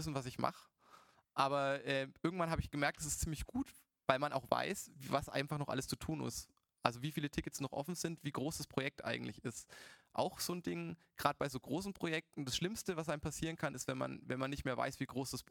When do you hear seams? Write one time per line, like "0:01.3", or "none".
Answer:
none